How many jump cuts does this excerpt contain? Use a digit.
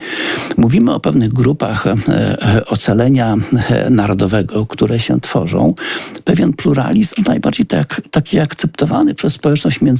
1